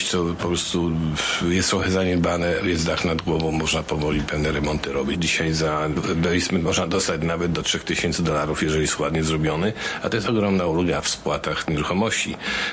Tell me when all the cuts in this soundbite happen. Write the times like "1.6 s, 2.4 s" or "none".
5.1 s